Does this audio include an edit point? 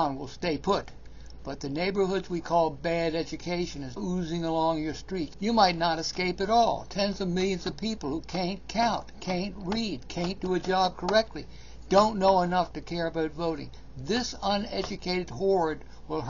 yes; 2 cuts; at 4.0 s, 5.3 s

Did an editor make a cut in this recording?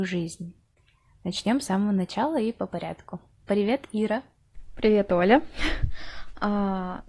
no; 0 cuts

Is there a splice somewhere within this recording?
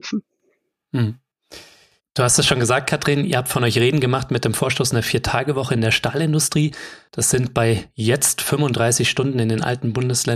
no; 0 cuts

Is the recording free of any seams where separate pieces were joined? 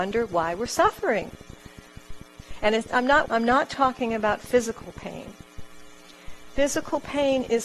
no; 2 cuts; at 2.2 s, 3.2 s

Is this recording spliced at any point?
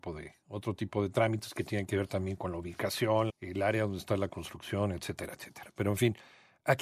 yes; 1 cut; at 3.3 s

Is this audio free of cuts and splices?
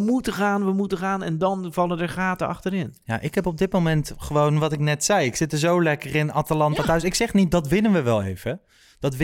yes; 0 cuts

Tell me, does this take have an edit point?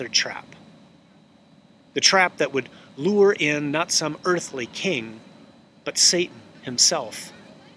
yes; 1 cut; at 1.9 s

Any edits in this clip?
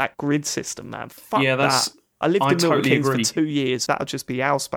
yes; 1 cut; at 3.9 s

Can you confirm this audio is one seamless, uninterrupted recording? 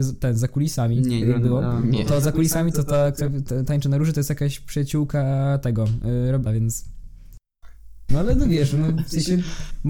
no; 3 cuts; at 1.2 s, 6.5 s, 8.1 s

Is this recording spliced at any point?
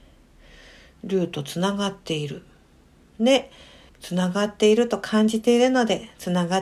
yes; 1 cut; at 3.9 s

